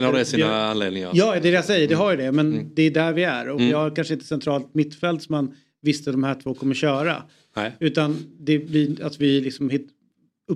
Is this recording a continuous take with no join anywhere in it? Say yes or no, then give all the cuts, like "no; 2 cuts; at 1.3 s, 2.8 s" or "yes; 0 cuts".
yes; 0 cuts